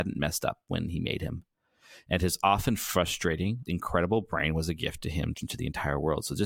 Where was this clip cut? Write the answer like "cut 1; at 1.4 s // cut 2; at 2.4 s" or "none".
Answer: cut 1; at 3.7 s // cut 2; at 5.3 s